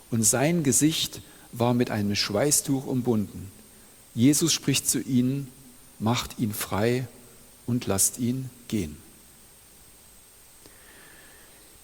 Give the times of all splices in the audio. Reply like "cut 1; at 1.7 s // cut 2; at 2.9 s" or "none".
none

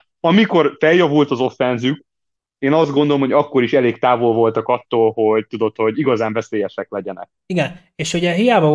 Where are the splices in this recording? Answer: none

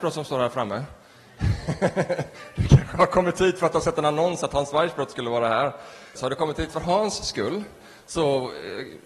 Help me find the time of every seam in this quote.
cut 1; at 6.2 s

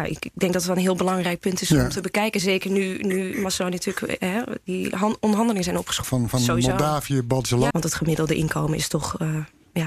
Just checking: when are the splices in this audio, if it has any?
cut 1; at 6.0 s // cut 2; at 7.7 s

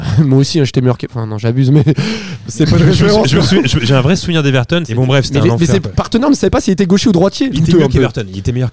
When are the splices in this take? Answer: cut 1; at 4.8 s // cut 2; at 7.5 s

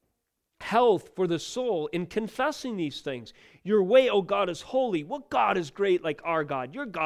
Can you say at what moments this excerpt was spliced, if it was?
none

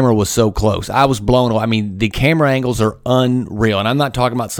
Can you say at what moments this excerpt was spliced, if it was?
none

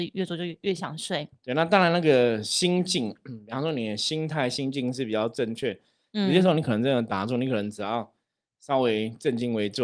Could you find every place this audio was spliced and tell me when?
none

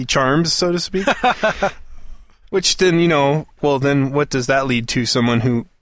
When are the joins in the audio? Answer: cut 1; at 3.6 s

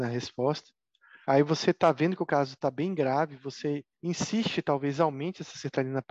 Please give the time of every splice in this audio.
cut 1; at 1.2 s // cut 2; at 3.9 s

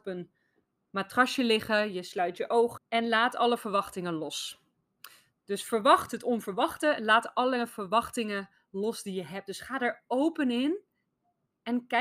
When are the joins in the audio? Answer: cut 1; at 2.8 s

